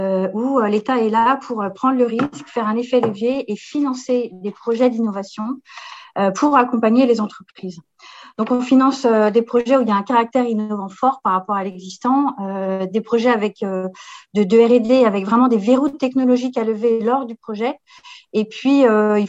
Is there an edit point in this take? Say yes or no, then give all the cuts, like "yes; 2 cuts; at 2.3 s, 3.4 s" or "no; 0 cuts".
no; 0 cuts